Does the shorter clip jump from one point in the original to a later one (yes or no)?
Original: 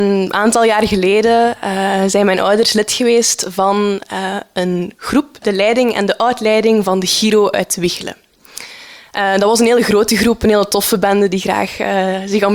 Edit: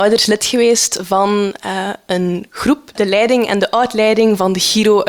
no